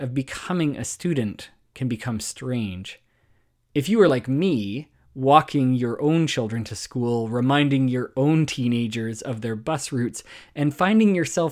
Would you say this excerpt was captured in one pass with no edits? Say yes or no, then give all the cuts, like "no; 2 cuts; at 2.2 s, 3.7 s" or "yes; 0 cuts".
yes; 0 cuts